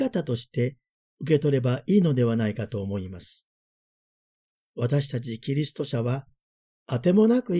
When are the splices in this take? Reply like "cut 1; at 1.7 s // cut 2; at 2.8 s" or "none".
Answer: none